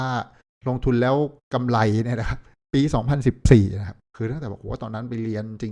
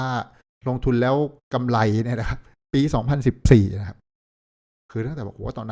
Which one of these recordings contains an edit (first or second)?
first